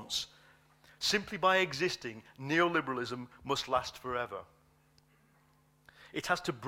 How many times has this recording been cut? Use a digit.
0